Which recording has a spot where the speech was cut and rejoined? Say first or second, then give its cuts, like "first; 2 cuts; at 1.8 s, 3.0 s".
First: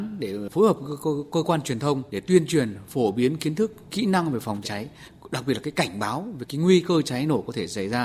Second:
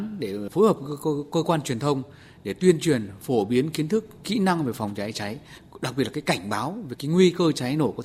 first; 2 cuts; at 2.1 s, 4.6 s